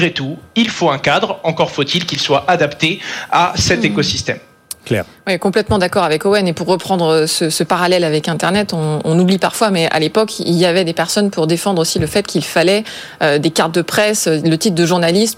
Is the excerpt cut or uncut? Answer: uncut